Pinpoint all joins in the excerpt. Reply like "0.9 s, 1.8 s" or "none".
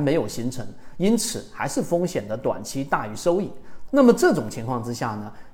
3.9 s